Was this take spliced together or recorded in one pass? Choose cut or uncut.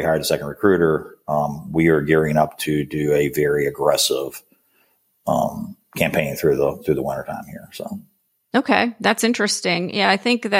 uncut